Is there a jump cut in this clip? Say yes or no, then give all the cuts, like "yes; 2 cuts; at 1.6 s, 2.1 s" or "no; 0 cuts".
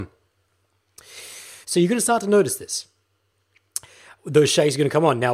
yes; 1 cut; at 1.6 s